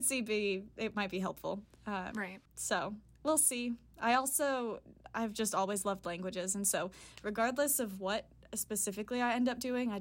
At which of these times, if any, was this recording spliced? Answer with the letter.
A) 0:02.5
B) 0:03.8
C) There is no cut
A